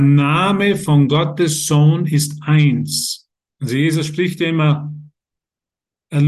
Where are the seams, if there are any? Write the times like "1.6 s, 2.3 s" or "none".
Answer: 3.5 s